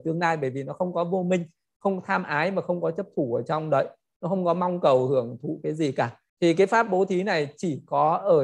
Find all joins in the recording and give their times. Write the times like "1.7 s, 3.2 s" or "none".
6.3 s